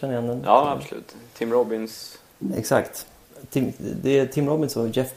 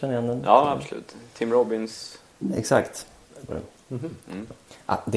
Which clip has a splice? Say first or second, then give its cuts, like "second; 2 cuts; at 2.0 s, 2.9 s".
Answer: second; 1 cut; at 3.5 s